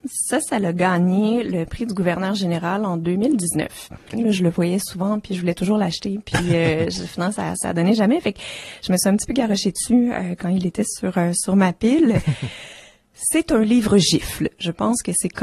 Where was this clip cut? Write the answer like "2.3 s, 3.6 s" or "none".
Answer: 4.1 s

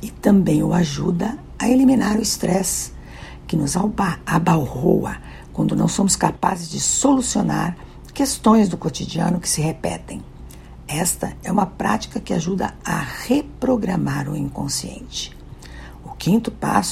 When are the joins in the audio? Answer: none

